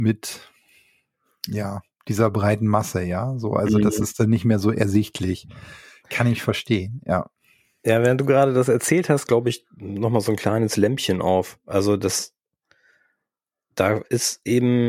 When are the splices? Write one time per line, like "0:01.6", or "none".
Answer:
0:09.3